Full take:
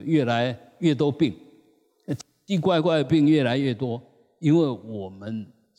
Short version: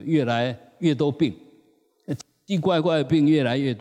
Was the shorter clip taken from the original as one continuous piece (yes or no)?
yes